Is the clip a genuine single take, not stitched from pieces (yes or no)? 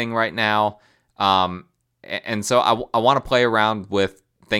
yes